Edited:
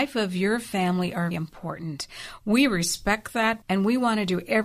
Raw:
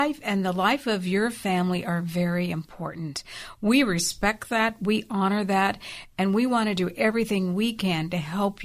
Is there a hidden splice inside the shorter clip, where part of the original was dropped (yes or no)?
yes